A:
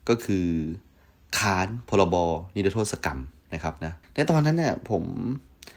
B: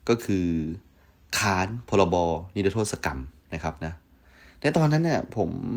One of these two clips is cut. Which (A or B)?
A